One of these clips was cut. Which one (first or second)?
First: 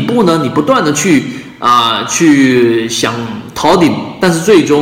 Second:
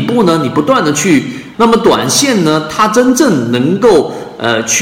second